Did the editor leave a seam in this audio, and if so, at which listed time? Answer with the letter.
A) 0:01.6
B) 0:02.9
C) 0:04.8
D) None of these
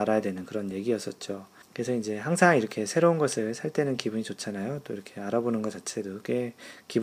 A